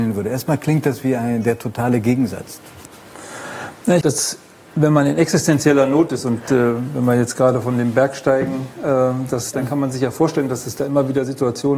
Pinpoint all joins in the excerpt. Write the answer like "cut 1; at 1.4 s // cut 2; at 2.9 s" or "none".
cut 1; at 4.0 s // cut 2; at 9.5 s